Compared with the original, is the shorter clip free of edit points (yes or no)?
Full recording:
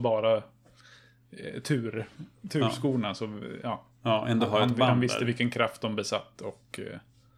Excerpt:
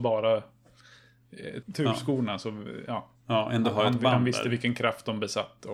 no